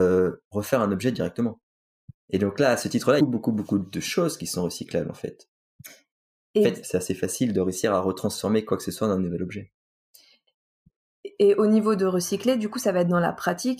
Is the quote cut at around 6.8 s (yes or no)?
yes